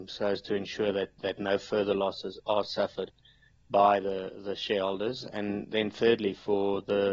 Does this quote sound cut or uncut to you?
uncut